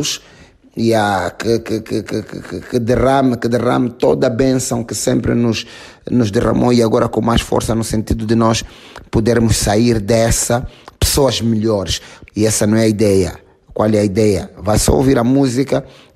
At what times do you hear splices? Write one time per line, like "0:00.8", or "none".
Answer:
0:12.3